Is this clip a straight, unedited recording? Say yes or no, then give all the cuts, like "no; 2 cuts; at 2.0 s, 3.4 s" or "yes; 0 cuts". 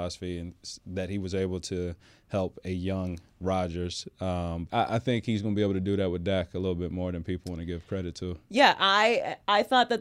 no; 1 cut; at 4.7 s